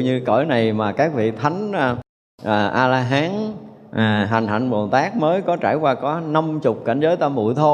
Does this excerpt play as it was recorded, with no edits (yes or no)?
yes